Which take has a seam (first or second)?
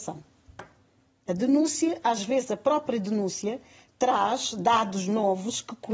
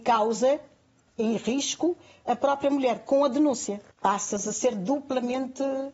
second